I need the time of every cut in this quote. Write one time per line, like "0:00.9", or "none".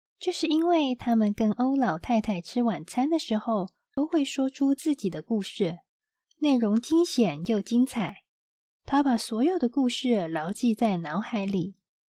0:08.7